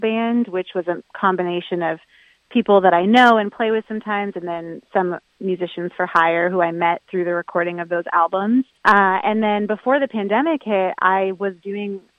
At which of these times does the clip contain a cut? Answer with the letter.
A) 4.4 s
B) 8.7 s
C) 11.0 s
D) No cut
B